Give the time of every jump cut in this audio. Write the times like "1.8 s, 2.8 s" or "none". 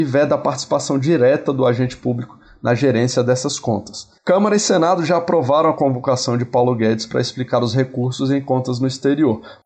4.2 s